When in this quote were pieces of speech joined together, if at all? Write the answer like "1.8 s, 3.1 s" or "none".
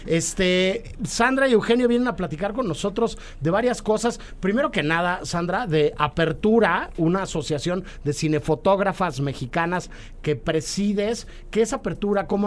none